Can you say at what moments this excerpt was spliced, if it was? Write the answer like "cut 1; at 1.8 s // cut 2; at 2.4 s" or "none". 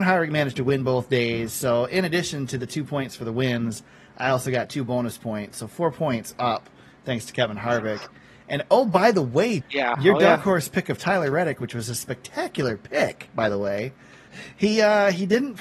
cut 1; at 9.6 s // cut 2; at 14.3 s